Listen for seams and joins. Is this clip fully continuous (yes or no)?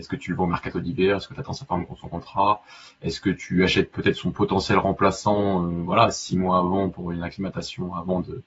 yes